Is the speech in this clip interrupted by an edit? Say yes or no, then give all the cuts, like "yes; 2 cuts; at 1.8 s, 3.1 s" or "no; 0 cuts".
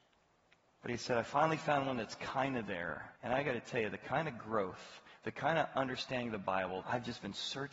yes; 2 cuts; at 3.1 s, 6.8 s